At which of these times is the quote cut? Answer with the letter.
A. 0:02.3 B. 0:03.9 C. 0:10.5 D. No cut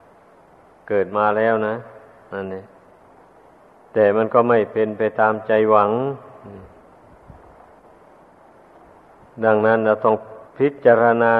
C